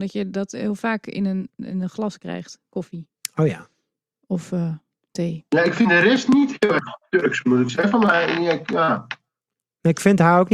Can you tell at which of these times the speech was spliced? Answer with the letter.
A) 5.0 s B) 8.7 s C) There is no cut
C